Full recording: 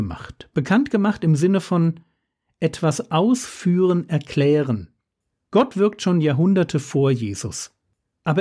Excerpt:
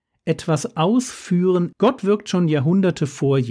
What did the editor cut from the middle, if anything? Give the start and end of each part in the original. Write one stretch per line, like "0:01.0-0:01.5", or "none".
0:04.1-0:05.5